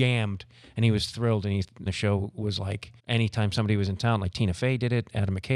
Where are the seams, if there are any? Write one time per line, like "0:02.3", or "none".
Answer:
0:01.9
0:03.0